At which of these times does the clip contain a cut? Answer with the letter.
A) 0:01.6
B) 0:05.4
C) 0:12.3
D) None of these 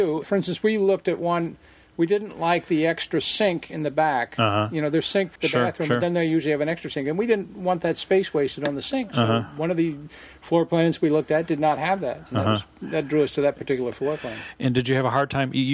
B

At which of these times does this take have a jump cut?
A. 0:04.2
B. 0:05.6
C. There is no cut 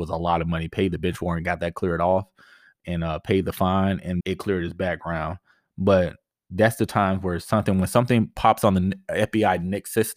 A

